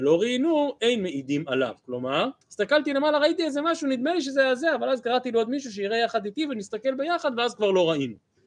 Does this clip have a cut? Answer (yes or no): yes